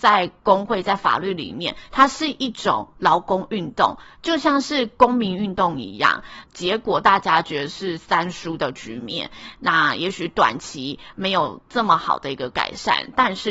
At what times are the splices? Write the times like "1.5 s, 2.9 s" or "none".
6.4 s